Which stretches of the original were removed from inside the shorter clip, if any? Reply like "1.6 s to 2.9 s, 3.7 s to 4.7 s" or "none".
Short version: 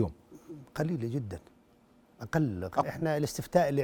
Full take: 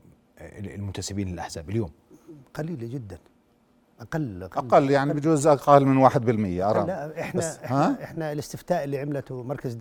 4.6 s to 8.0 s